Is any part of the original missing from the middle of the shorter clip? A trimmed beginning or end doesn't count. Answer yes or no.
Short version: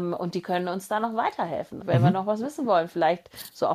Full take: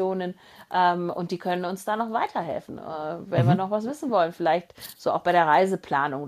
yes